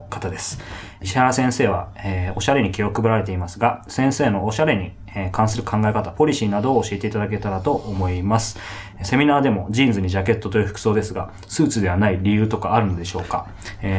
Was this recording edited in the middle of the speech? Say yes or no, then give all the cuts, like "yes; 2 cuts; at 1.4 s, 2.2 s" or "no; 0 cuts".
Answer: yes; 1 cut; at 1.0 s